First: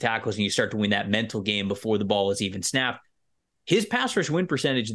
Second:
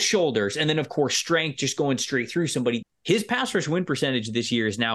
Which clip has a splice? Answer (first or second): second